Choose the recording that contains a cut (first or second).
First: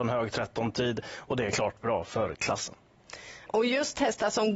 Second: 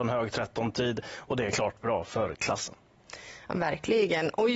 first